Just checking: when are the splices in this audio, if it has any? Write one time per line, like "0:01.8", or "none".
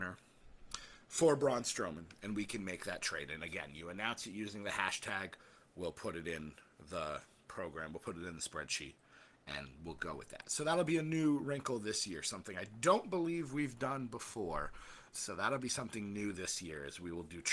0:15.1